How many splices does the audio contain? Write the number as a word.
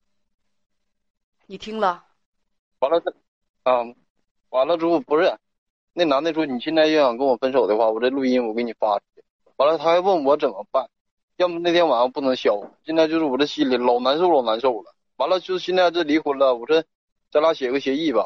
one